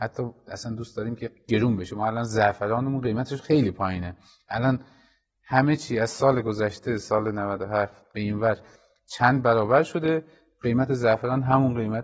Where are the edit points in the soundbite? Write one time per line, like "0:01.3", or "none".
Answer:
none